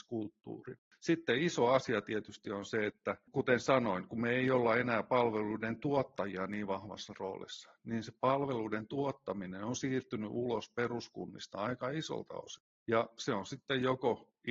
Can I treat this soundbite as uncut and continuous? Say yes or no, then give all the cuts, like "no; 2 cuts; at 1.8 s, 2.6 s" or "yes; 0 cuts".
yes; 0 cuts